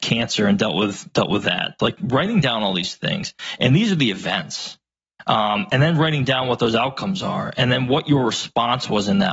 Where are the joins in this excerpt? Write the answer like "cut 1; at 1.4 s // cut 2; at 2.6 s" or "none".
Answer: cut 1; at 1.8 s